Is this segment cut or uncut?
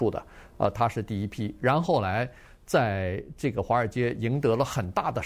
cut